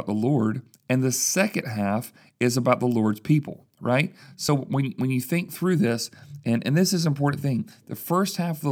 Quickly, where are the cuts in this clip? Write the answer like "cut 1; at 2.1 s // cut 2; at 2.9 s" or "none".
none